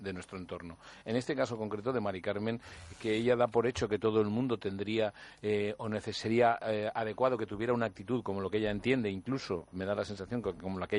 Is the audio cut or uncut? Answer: uncut